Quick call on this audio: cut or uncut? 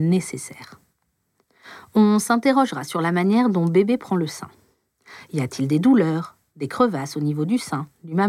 uncut